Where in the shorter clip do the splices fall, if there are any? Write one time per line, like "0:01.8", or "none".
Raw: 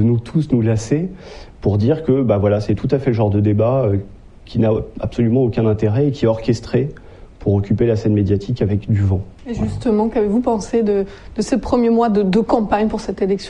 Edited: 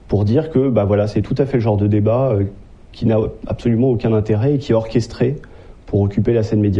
none